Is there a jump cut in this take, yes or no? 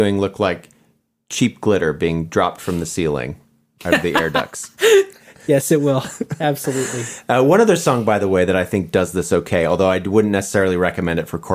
no